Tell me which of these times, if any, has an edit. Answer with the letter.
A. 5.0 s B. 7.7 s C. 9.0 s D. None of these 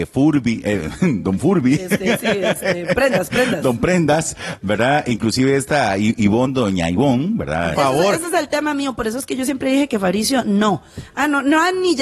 B